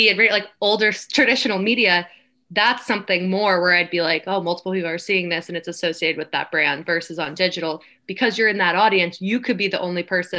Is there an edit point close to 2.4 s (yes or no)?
no